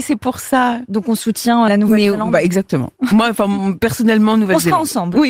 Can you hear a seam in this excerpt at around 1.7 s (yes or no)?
yes